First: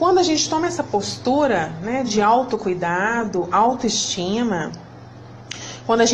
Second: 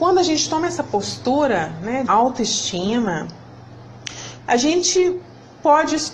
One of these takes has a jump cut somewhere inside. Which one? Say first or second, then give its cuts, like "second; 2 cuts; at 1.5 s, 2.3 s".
second; 2 cuts; at 2.1 s, 4.4 s